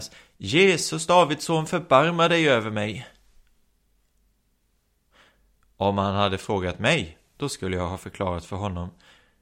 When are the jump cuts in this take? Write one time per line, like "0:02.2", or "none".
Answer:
none